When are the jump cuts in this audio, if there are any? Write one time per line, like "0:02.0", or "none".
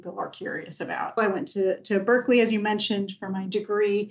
0:01.2